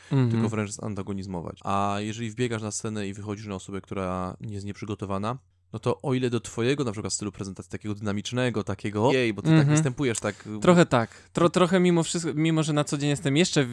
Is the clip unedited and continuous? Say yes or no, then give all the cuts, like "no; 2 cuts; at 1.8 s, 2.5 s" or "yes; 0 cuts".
no; 1 cut; at 9.1 s